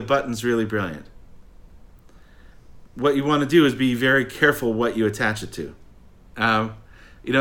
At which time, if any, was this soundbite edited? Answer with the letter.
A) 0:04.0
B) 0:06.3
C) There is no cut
B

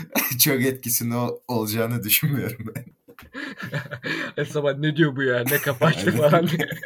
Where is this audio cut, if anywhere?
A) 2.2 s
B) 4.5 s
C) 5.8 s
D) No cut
B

